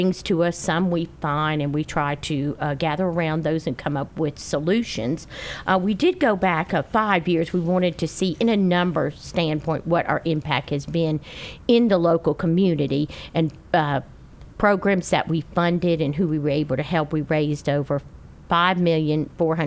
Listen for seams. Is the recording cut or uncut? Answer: cut